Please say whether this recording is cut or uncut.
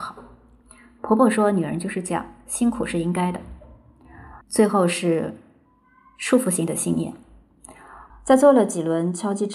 cut